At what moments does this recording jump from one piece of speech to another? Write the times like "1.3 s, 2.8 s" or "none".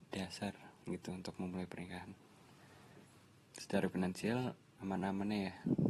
4.8 s